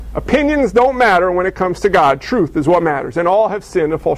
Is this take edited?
no; 0 cuts

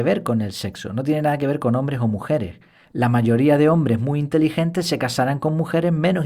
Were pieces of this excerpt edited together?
no; 0 cuts

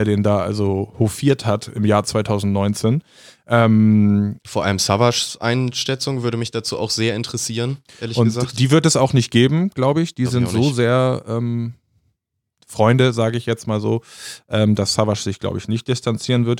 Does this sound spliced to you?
no; 0 cuts

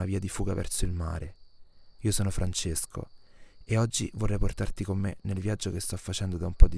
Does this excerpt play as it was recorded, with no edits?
yes; 0 cuts

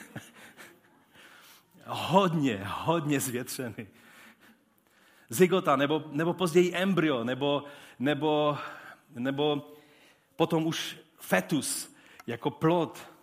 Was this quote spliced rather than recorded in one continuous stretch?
no; 0 cuts

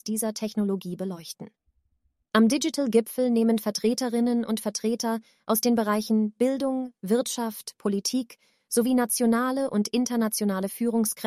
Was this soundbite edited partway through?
no; 0 cuts

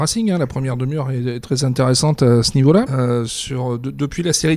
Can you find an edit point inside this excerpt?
yes; 1 cut; at 2.9 s

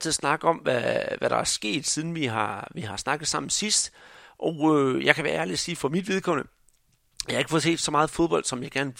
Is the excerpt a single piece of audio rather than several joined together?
yes; 0 cuts

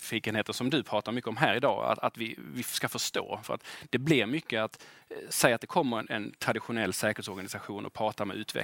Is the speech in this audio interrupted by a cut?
no; 0 cuts

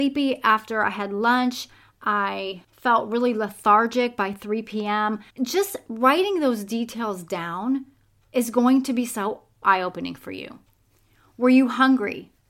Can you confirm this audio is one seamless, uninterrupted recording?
no; 2 cuts; at 5.3 s, 9.6 s

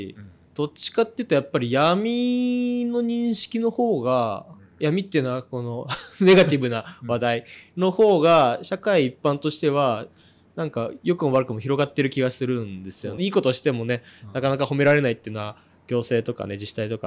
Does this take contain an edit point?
yes; 1 cut; at 13.2 s

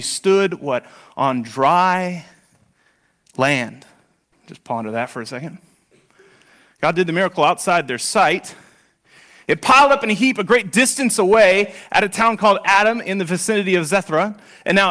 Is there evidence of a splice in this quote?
yes; 1 cut; at 4.3 s

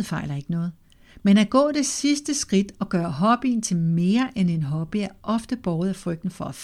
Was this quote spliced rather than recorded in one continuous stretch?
no; 0 cuts

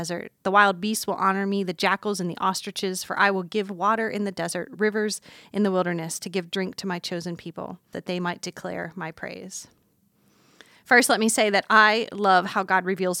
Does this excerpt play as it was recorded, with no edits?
no; 1 cut; at 7.9 s

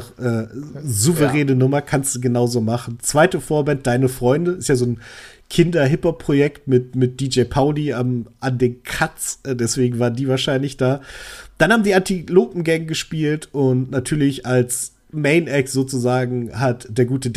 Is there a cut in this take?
no; 0 cuts

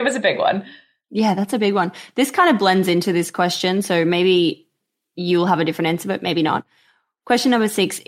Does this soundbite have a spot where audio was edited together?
no; 0 cuts

